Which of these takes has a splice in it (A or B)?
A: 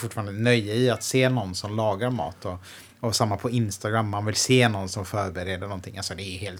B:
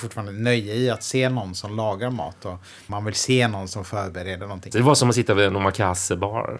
B